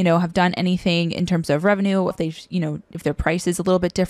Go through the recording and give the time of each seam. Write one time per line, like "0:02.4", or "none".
0:02.1